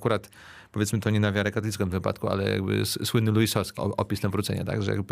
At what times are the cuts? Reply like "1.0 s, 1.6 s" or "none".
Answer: 3.8 s